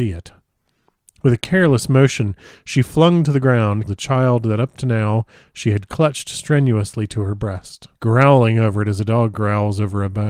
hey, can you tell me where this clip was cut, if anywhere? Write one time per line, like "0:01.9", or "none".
0:03.9
0:07.9